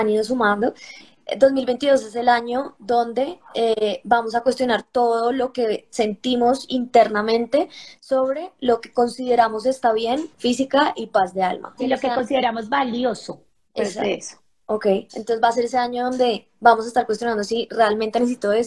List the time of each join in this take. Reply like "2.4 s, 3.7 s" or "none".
10.3 s, 11.8 s